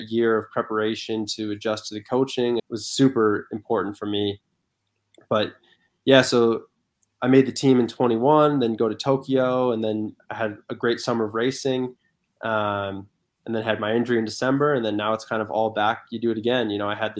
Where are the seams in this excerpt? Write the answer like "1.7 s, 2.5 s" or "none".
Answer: 2.6 s